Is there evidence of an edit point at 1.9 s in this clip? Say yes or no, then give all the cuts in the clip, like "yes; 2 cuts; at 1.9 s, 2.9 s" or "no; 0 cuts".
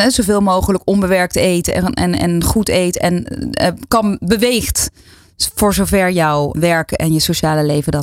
no; 1 cut; at 6.5 s